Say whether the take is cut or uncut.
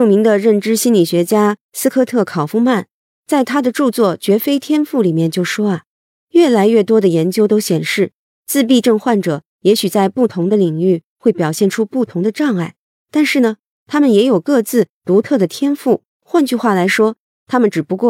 cut